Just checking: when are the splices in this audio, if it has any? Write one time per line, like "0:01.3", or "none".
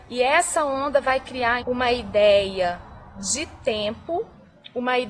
0:01.6